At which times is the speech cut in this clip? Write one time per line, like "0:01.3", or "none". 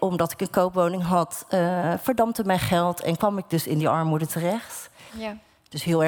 0:05.1